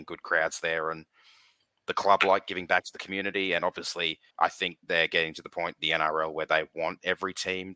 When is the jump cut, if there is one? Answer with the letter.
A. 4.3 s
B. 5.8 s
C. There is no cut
A